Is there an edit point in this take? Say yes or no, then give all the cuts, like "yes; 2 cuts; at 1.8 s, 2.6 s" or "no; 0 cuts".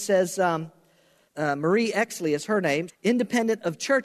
yes; 2 cuts; at 1.3 s, 2.9 s